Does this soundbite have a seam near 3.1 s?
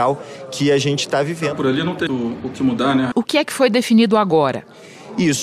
yes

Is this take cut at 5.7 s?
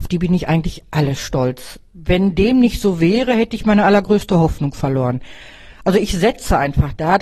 no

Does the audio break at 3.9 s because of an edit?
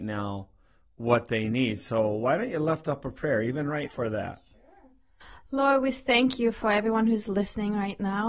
yes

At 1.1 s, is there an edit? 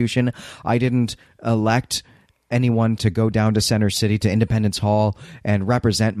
no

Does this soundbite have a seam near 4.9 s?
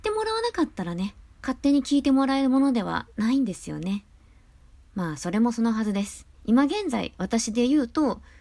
no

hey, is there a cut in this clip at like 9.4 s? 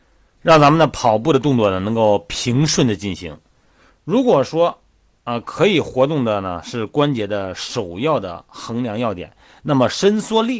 no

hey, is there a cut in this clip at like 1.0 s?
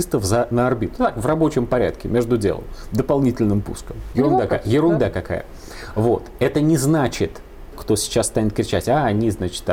no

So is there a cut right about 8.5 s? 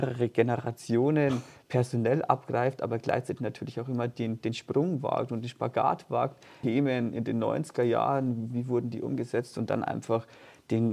yes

